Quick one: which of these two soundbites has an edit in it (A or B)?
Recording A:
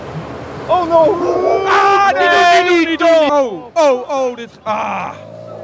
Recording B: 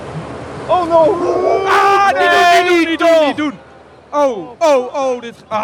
A